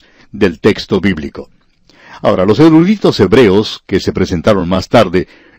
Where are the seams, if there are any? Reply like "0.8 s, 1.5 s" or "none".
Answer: 2.1 s